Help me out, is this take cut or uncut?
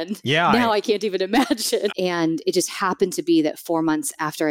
cut